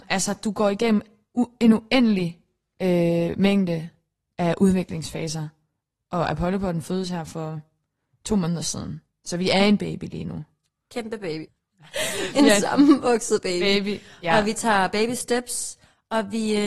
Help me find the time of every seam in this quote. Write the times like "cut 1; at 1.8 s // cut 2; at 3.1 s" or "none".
cut 1; at 11.5 s